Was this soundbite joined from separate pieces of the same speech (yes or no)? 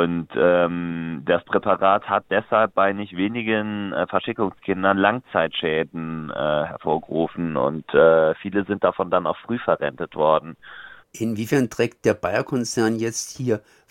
yes